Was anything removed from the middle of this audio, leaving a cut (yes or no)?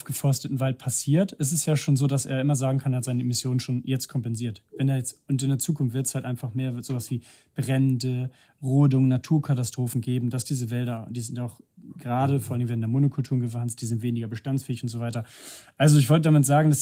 no